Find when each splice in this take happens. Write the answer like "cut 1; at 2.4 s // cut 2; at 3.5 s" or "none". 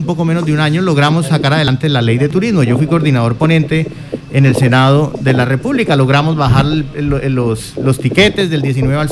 none